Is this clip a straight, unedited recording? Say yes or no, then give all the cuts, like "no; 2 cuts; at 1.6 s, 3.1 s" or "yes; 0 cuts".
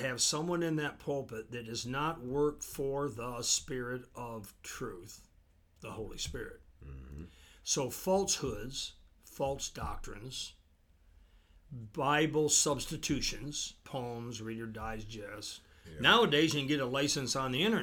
no; 2 cuts; at 13.8 s, 15.8 s